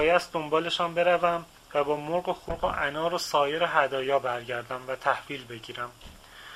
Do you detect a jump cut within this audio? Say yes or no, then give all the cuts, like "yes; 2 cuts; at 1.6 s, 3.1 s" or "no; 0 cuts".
no; 0 cuts